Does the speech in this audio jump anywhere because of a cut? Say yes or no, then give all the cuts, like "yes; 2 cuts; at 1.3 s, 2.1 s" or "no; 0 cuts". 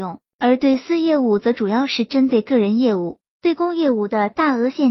no; 0 cuts